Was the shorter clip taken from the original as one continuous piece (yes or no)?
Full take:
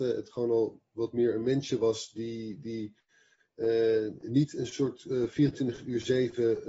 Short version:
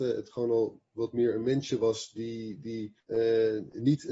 no